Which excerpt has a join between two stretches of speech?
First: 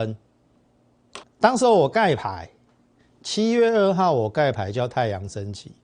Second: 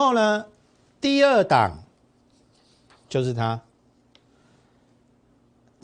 first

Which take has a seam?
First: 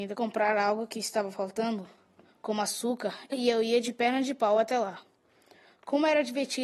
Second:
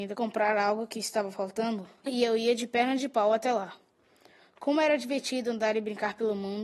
second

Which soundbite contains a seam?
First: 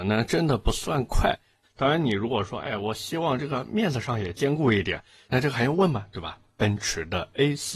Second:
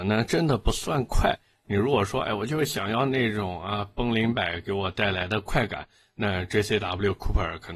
first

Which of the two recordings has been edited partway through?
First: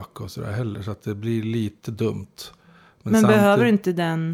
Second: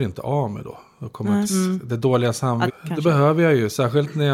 second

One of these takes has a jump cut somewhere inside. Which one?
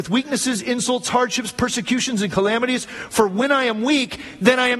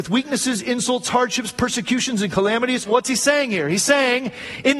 second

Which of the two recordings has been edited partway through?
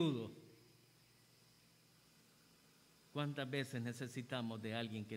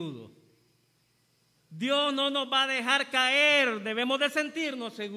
second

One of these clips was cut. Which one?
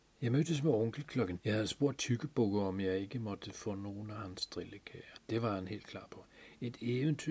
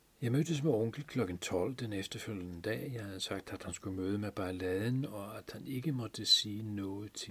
first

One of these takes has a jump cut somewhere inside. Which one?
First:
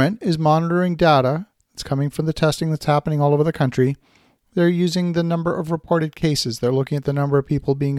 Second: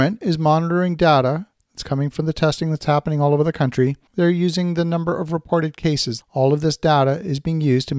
second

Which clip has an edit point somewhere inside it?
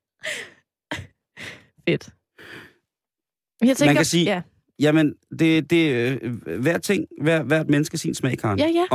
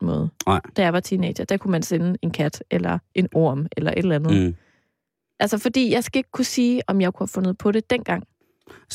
second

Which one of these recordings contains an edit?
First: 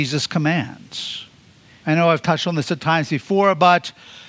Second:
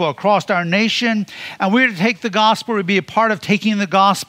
first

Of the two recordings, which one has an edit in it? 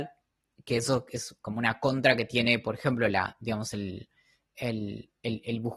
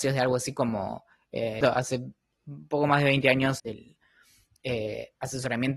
second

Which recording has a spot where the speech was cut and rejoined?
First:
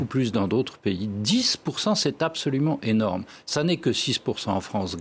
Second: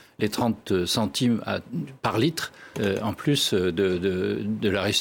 second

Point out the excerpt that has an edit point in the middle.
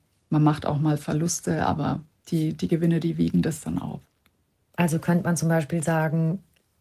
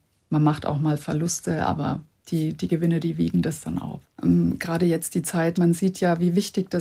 second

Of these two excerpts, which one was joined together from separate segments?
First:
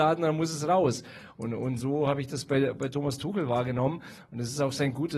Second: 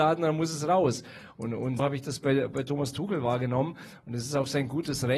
second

